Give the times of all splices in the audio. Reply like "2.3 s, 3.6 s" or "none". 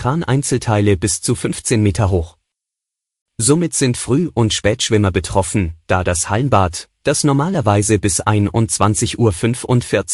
3.3 s